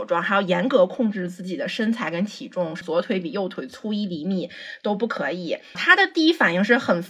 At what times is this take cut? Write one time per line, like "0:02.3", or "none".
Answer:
0:05.7